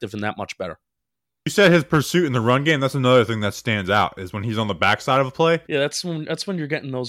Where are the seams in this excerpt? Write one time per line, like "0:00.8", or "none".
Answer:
0:05.7